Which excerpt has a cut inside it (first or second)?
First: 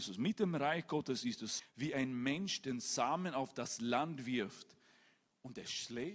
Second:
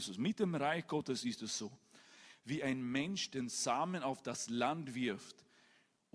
first